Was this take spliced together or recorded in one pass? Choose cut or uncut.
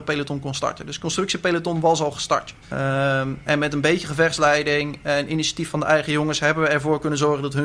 cut